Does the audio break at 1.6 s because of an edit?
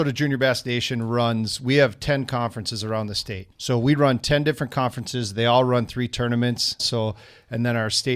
no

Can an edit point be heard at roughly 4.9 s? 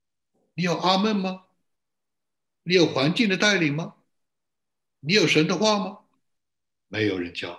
yes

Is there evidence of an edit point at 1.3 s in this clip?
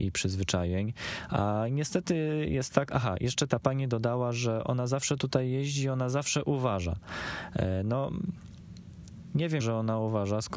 no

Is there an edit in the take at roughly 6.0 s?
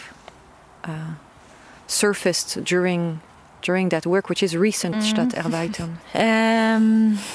yes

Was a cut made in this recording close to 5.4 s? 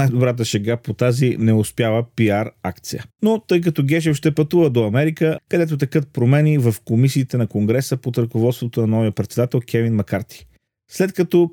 yes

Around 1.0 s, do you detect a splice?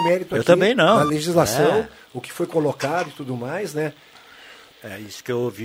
no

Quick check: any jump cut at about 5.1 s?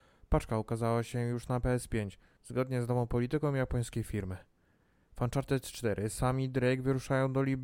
no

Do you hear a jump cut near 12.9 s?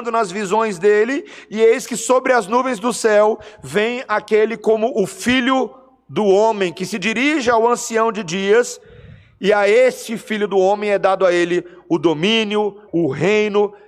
yes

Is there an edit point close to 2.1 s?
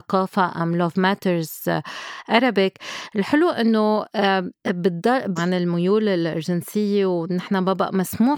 no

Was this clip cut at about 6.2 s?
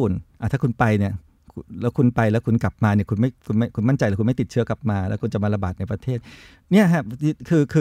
no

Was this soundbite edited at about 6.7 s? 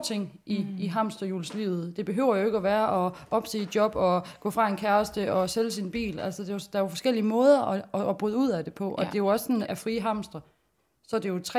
no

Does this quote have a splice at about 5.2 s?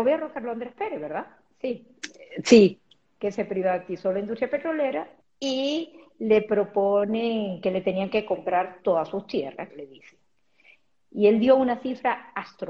yes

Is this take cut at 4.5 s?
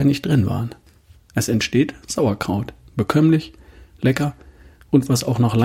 no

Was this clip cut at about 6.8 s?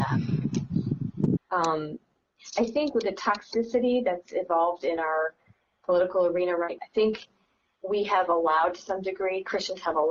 yes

